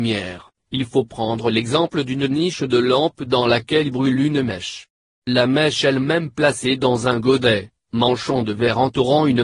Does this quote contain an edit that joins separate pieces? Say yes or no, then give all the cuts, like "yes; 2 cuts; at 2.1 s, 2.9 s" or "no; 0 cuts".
no; 0 cuts